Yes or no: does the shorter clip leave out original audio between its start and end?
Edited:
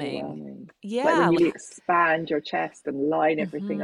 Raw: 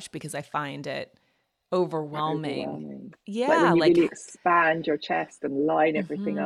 yes